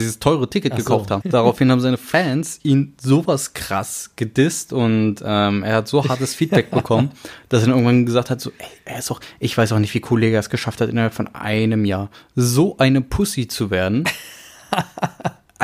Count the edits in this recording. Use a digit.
1